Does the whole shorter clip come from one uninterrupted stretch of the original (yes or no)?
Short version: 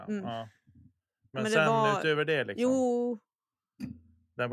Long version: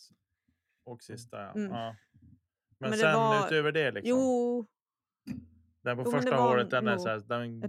yes